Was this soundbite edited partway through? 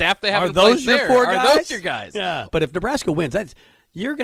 yes; 1 cut; at 2.5 s

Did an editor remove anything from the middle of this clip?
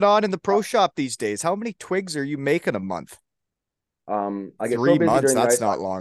yes; 1 cut; at 4.0 s

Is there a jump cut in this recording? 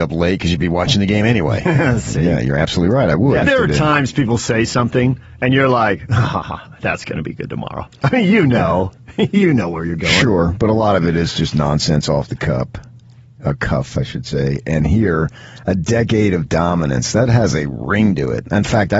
yes; 1 cut; at 3.4 s

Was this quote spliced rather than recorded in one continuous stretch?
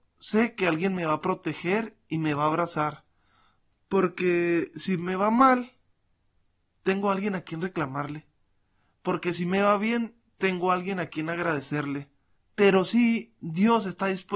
yes; 2 cuts; at 3.8 s, 12.4 s

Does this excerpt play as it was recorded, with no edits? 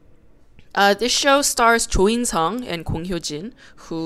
yes; 0 cuts

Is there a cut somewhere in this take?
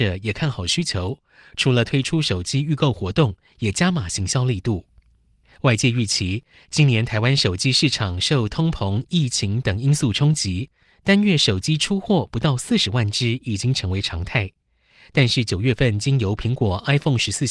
no; 0 cuts

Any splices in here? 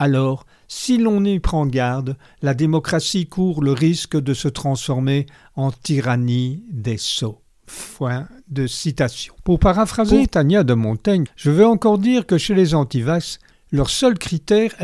yes; 2 cuts; at 11.3 s, 13.5 s

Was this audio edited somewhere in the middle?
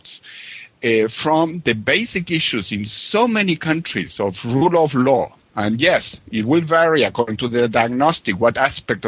no; 0 cuts

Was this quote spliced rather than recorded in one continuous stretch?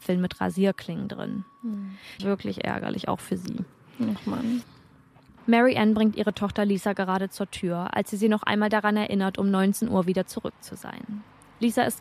yes; 1 cut; at 2.2 s

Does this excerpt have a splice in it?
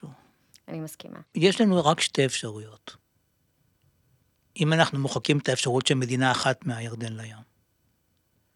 yes; 1 cut; at 1.3 s

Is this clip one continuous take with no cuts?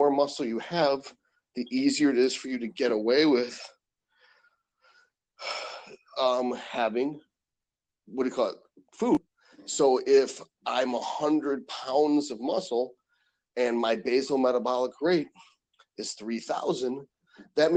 yes; 0 cuts

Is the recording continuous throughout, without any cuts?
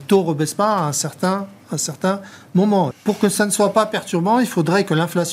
no; 1 cut; at 2.9 s

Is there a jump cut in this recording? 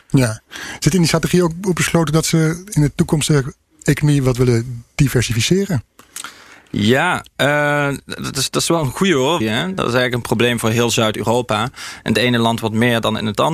yes; 1 cut; at 9.4 s

